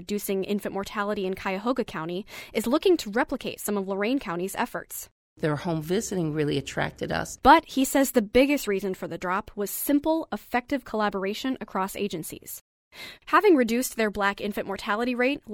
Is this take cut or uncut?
cut